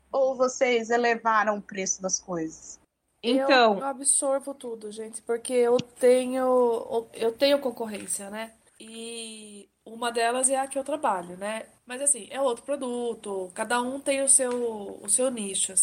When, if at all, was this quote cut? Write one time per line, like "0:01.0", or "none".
0:08.7
0:11.8

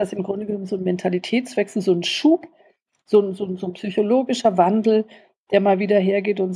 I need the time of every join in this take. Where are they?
none

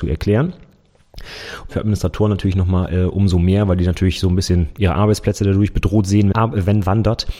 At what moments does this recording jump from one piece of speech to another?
0:01.7
0:06.3

